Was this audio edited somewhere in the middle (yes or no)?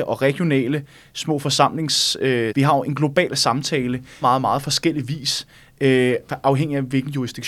yes